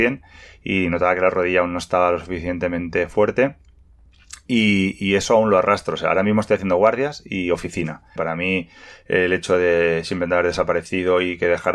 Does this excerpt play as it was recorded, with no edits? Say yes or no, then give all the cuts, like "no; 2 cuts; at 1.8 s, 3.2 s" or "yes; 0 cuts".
no; 1 cut; at 8.2 s